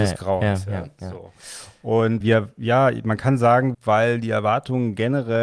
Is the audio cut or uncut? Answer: cut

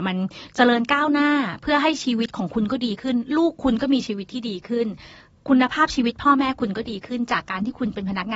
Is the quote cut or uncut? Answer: uncut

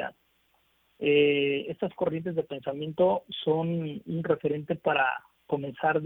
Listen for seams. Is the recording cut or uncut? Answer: cut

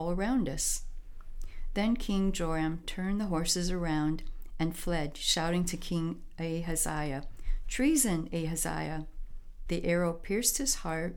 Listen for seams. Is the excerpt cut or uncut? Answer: cut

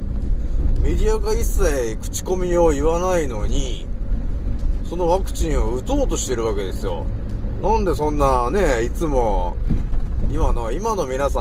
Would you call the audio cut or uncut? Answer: cut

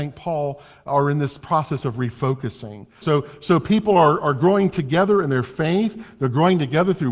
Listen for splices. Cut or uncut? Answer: cut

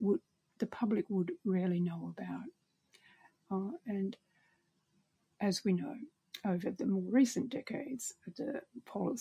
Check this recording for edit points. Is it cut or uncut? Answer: uncut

